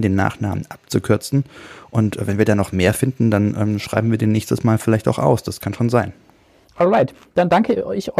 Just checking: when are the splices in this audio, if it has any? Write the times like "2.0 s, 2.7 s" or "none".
6.7 s